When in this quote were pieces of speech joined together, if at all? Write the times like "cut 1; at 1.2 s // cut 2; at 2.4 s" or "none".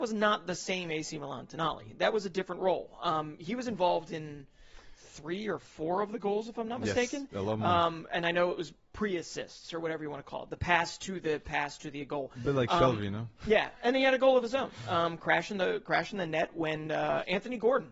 none